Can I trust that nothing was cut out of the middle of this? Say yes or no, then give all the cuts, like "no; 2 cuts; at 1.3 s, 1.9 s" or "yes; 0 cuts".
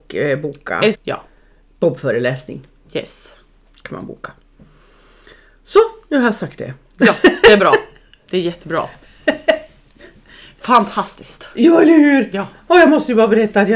no; 1 cut; at 0.9 s